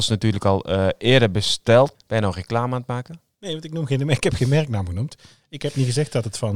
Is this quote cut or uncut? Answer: cut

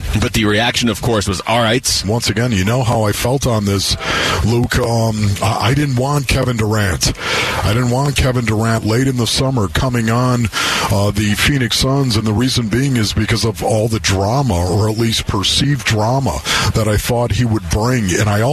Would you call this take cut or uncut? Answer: cut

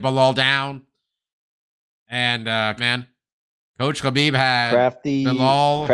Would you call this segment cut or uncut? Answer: cut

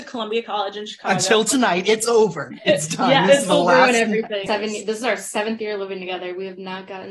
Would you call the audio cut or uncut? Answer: cut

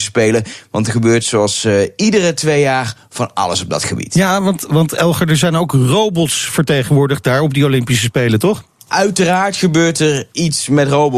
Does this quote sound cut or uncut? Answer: uncut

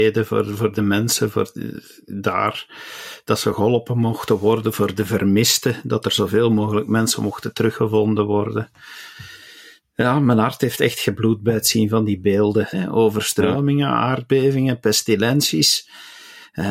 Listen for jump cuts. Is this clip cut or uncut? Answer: cut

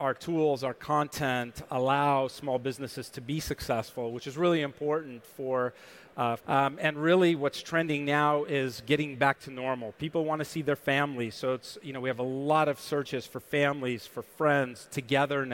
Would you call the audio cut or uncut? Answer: cut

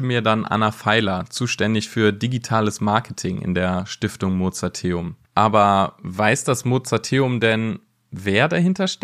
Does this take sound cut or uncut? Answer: cut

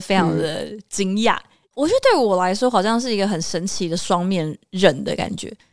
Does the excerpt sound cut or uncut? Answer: uncut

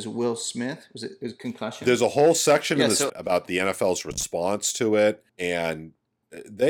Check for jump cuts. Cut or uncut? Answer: cut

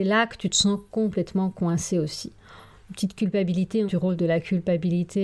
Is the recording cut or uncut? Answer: cut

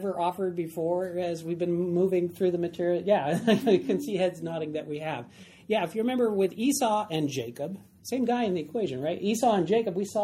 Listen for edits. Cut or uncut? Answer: uncut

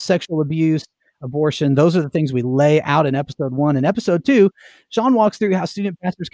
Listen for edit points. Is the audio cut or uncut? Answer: uncut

